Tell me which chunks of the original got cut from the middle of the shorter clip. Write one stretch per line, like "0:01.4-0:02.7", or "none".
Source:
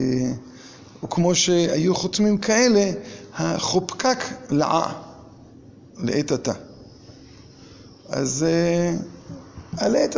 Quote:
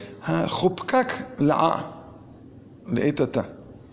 none